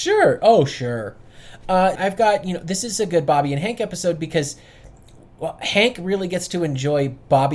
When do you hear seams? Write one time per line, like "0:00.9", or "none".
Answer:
0:02.0

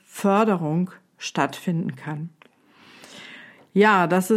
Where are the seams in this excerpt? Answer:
none

